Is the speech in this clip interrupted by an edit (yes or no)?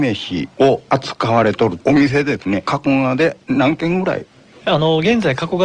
no